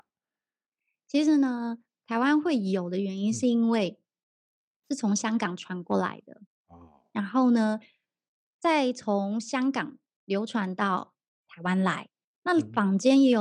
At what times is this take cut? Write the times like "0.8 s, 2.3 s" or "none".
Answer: 6.5 s